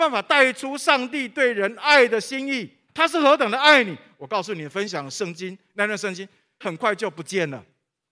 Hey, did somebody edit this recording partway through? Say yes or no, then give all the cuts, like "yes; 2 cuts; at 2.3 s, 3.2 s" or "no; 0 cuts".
yes; 2 cuts; at 2.9 s, 6.6 s